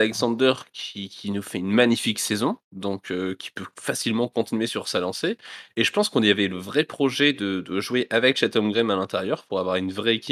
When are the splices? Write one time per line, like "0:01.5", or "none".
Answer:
none